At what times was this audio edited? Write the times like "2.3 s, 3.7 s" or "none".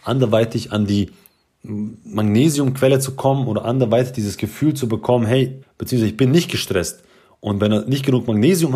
5.6 s

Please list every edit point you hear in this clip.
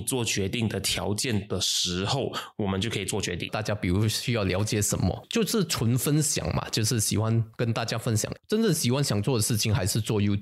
3.5 s, 8.4 s

